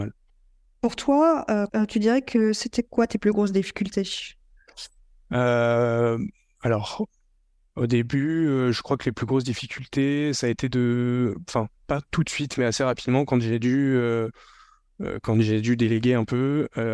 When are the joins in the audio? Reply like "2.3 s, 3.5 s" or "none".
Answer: 1.7 s